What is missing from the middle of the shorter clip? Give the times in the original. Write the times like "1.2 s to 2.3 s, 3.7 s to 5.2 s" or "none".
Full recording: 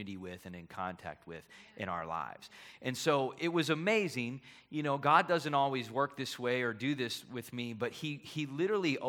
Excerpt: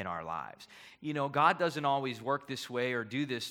2.8 s to 4.6 s